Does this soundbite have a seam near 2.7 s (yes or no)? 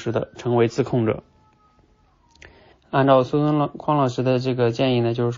yes